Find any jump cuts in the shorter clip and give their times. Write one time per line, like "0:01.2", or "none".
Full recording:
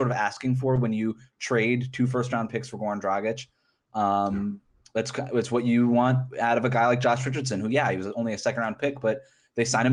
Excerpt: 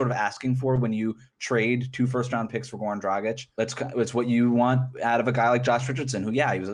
0:03.5